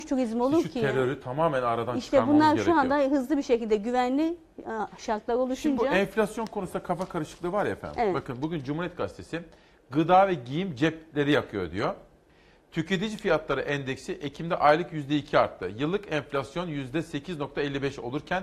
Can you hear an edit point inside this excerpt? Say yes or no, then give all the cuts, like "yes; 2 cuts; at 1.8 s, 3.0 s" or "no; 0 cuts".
no; 0 cuts